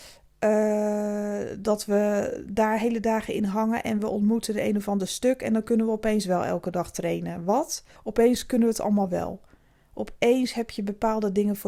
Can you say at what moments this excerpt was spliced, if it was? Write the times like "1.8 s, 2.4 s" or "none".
8.0 s